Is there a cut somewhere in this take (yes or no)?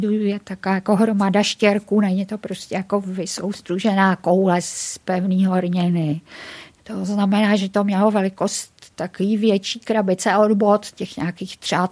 yes